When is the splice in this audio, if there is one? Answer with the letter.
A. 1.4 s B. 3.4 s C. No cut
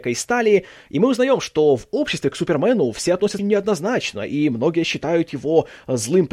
B